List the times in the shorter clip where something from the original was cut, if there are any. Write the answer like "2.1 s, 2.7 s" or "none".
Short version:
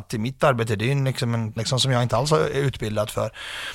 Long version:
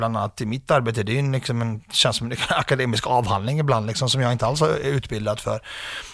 1.6 s